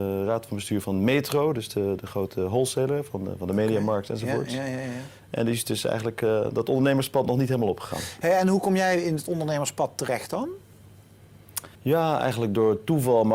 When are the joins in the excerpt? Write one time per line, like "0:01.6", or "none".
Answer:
0:11.7